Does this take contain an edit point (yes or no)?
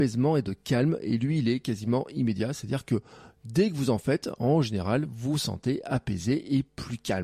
no